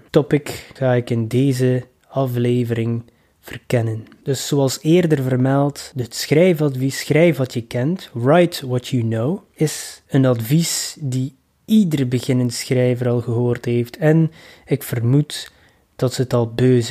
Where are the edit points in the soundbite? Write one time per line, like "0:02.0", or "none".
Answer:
none